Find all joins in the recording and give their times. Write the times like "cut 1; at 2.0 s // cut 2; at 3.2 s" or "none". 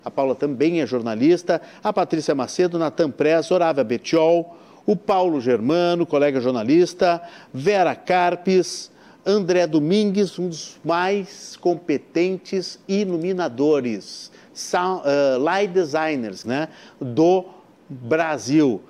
cut 1; at 16.4 s

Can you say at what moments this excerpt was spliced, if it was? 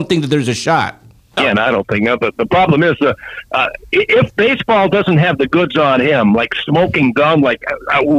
cut 1; at 1.4 s

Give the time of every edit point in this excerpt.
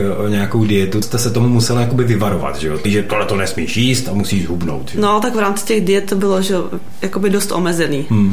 cut 1; at 1.0 s // cut 2; at 2.8 s

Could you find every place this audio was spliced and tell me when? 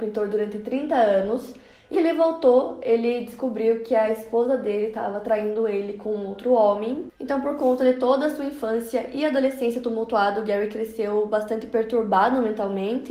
cut 1; at 1.9 s // cut 2; at 7.1 s

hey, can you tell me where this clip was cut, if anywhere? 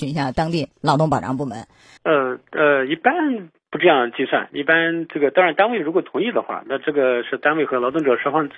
cut 1; at 2.0 s

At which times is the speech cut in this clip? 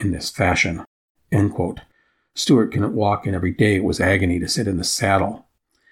cut 1; at 1.1 s

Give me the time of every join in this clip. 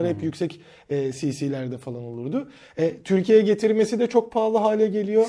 none

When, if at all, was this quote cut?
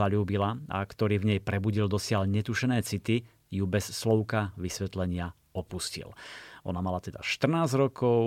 none

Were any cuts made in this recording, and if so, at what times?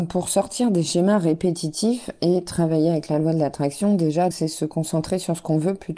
cut 1; at 4.3 s

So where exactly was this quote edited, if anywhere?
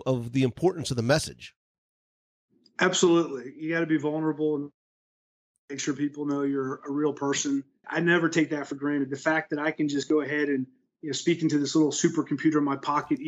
cut 1; at 7.8 s

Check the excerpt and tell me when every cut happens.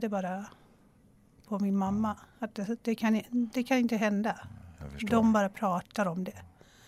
none

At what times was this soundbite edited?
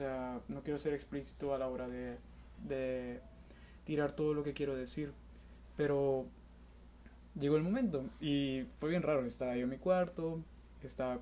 none

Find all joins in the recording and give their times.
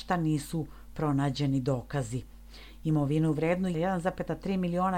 none

